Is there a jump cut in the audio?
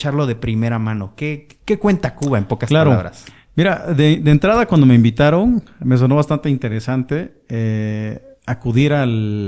no; 0 cuts

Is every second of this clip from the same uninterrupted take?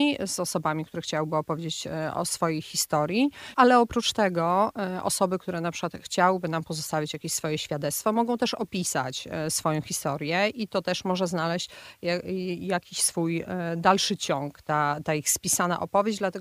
yes; 0 cuts

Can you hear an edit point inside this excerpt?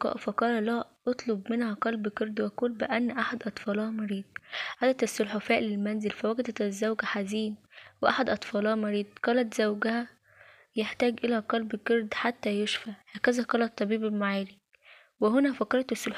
yes; 1 cut; at 13.0 s

